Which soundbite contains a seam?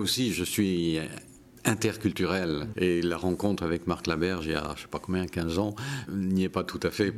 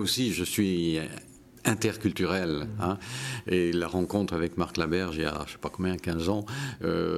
first; 2 cuts; at 2.7 s, 6.1 s

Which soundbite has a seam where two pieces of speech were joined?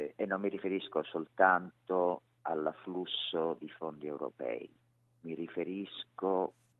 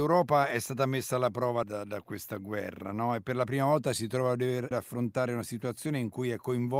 second; 2 cuts; at 1.6 s, 4.7 s

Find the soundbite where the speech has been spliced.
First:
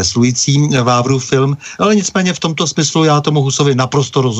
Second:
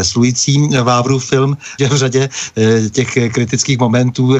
second; 1 cut; at 1.8 s

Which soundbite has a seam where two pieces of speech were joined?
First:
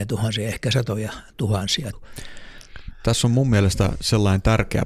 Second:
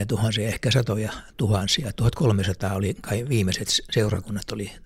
first; 1 cut; at 1.9 s

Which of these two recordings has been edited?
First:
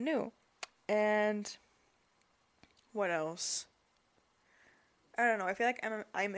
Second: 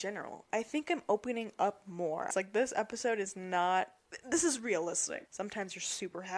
second; 2 cuts; at 2.3 s, 5.2 s

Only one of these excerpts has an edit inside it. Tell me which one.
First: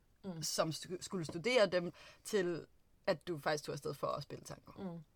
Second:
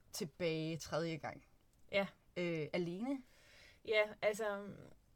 first; 1 cut; at 1.9 s

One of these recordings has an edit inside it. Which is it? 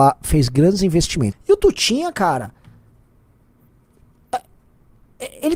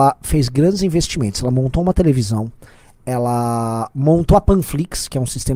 first; 1 cut; at 1.3 s

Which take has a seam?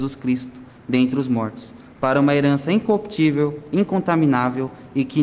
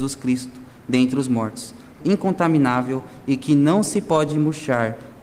second; 1 cut; at 2.0 s

